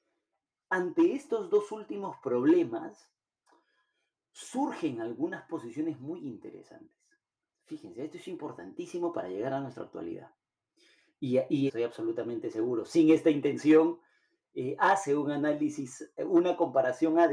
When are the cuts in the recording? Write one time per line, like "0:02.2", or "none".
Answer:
0:11.7